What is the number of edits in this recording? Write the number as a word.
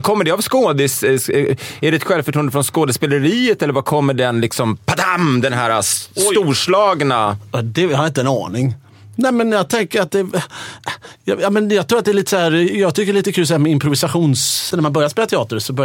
one